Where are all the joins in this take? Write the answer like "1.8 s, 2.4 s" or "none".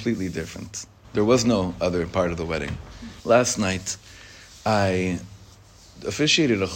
1.0 s, 3.2 s